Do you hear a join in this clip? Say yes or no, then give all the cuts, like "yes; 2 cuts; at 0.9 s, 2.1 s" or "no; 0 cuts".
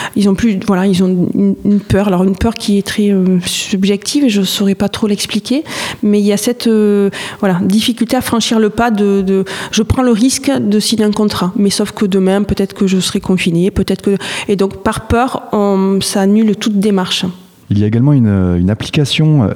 no; 0 cuts